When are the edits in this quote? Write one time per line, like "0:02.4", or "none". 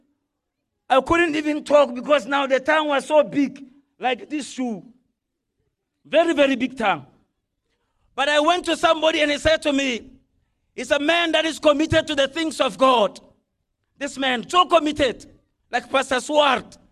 none